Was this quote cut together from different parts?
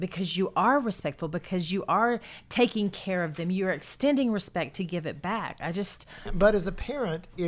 yes; 1 cut; at 6.3 s

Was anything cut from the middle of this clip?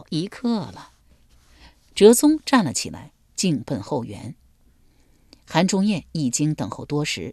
no; 0 cuts

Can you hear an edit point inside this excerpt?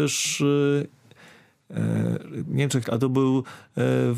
yes; 1 cut; at 2.8 s

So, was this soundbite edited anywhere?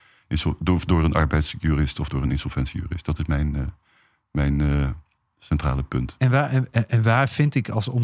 no; 0 cuts

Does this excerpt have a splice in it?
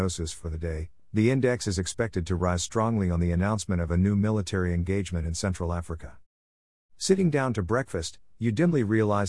no; 0 cuts

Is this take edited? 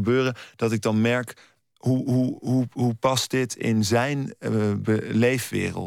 no; 0 cuts

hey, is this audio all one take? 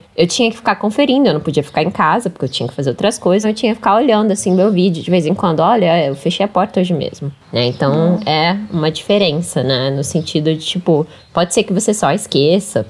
no; 1 cut; at 3.4 s

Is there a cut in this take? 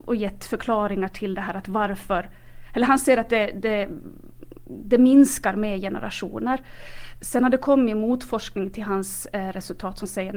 no; 0 cuts

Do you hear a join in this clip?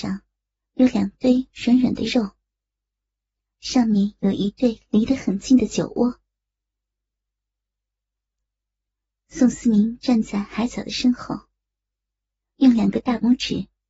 no; 0 cuts

